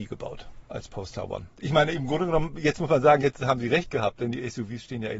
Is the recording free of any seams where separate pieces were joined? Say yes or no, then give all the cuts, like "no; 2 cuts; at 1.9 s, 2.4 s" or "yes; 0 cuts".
no; 1 cut; at 1.5 s